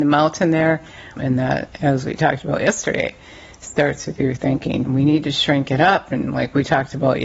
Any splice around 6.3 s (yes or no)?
no